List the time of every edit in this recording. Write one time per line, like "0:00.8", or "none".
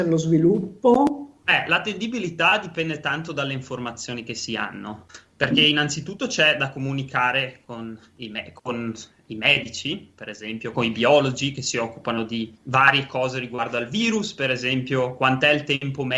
0:10.7
0:12.5